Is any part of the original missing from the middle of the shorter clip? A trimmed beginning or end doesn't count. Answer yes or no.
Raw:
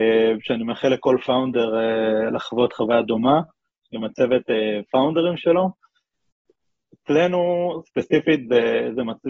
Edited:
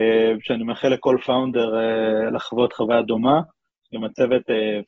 no